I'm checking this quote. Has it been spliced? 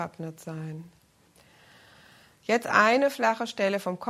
yes; 1 cut; at 1.3 s

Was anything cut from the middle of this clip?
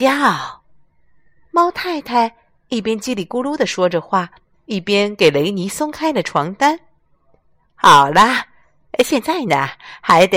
no; 0 cuts

